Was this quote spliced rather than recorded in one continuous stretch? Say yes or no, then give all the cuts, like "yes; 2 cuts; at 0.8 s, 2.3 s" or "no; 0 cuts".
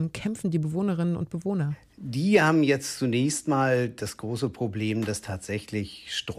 no; 0 cuts